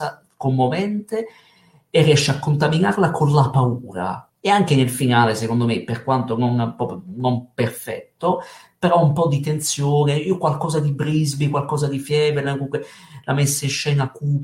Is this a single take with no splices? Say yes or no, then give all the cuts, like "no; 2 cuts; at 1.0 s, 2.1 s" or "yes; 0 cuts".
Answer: no; 1 cut; at 4.3 s